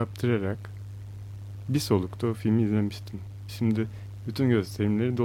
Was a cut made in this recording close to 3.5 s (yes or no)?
yes